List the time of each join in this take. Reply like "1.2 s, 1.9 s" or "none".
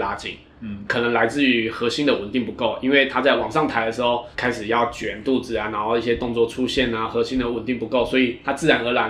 4.3 s

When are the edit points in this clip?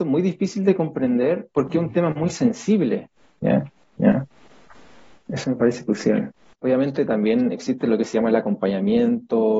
3.8 s, 6.5 s

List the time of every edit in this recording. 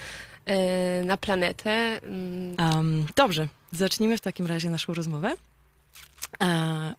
2.5 s

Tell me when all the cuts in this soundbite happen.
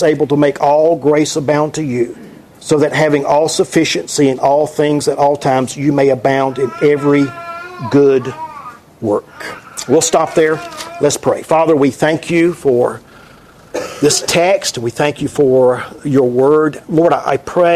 none

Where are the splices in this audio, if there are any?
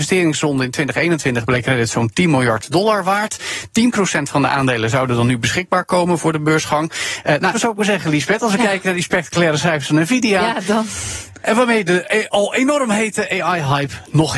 7.5 s

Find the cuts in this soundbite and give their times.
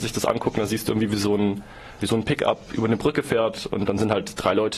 2.0 s

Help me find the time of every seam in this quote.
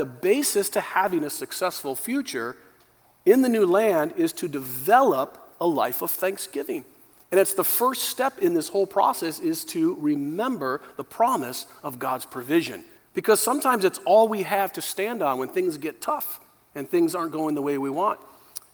13.0 s

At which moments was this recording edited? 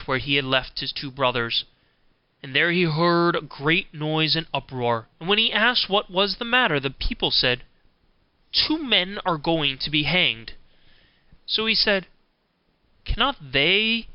5.1 s, 11.4 s

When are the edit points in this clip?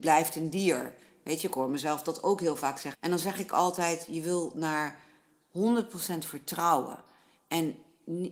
2.9 s

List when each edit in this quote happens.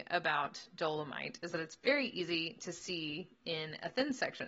none

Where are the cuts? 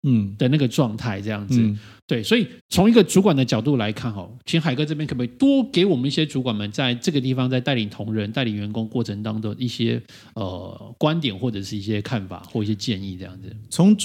2.6 s

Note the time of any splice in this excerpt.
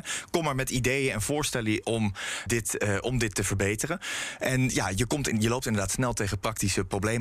2.5 s

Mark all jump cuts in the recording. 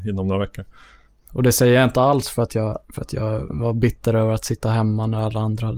1.3 s, 2.8 s

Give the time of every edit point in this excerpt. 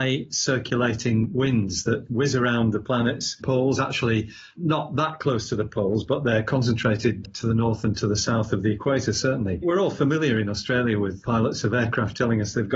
7.2 s

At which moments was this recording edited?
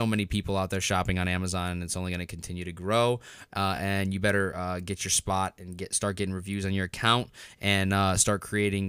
none

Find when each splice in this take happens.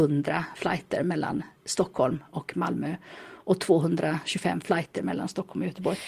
none

